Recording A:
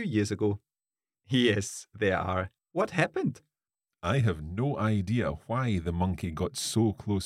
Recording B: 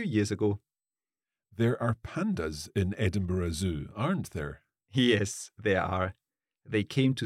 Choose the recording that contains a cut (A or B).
A